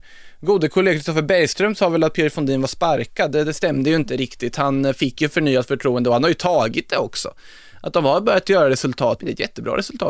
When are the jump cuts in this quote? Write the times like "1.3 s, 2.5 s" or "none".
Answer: 9.2 s